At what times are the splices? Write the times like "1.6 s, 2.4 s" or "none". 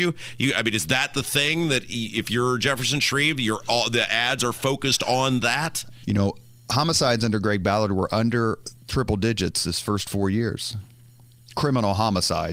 6.0 s, 8.8 s